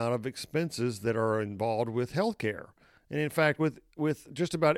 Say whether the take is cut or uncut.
uncut